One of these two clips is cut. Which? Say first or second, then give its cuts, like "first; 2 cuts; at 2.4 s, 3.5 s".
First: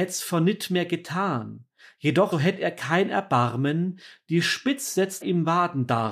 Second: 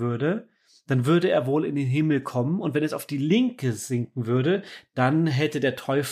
first; 2 cuts; at 2.3 s, 5.2 s